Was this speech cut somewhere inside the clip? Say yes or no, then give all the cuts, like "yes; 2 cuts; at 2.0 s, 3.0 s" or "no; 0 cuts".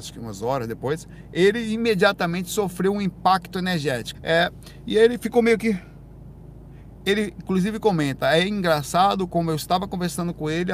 yes; 1 cut; at 4.1 s